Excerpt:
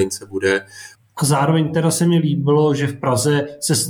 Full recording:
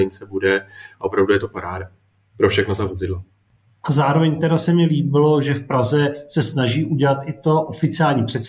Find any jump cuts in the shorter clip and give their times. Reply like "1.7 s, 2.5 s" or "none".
0.9 s